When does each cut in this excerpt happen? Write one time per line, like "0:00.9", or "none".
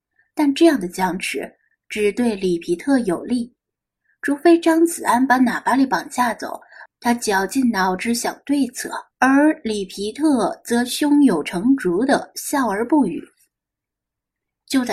0:06.9
0:09.1

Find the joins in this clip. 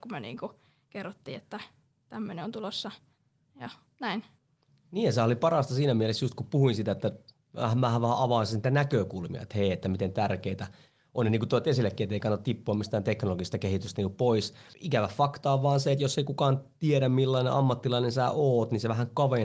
none

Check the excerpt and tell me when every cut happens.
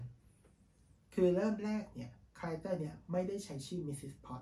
none

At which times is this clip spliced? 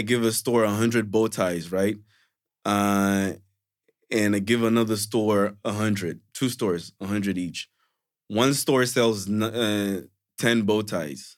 none

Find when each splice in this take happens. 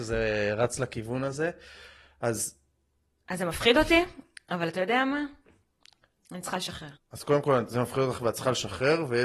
0:06.9

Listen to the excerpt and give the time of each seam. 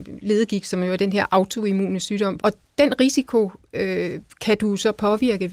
0:02.4

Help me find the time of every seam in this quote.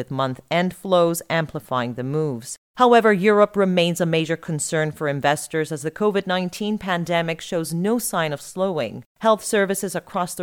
none

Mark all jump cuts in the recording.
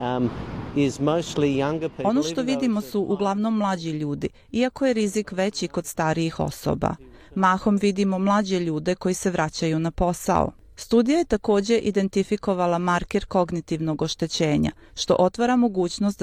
0:14.9

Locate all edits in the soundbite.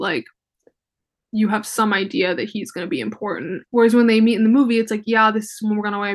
0:03.7

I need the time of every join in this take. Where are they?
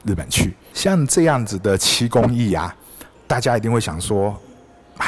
0:03.1

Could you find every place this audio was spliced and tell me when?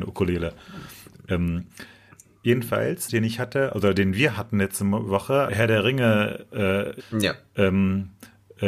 0:03.1
0:05.5
0:07.0

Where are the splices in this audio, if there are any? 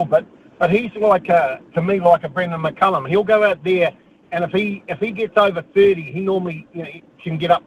none

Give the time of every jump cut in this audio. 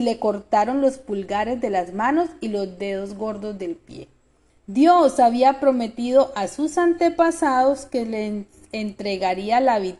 0:04.5

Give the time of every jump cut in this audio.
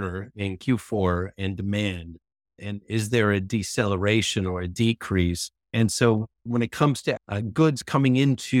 0:05.6
0:07.2

